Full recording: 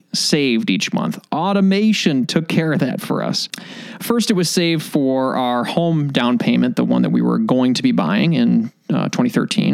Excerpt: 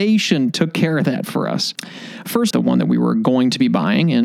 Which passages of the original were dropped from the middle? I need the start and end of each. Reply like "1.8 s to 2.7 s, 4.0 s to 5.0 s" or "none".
4.3 s to 6.7 s